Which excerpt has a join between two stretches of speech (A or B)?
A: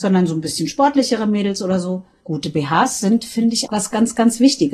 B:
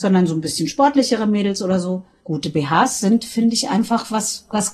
A